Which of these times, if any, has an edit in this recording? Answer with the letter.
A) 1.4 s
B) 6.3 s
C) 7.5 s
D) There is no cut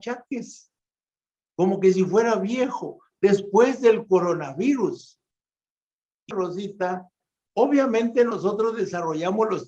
B